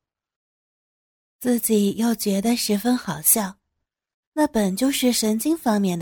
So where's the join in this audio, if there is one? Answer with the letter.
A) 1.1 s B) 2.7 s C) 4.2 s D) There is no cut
C